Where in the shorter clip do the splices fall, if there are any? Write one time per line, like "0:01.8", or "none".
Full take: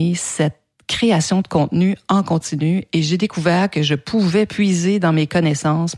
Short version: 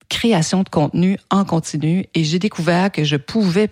none